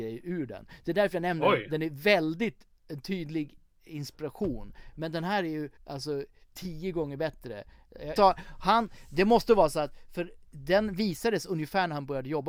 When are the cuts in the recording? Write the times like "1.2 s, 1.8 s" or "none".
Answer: 5.8 s, 8.2 s